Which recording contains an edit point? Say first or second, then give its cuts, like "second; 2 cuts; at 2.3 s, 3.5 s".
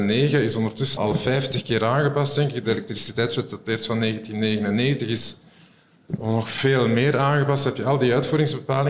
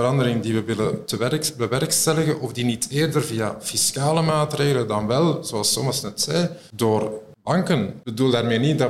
first; 1 cut; at 1.0 s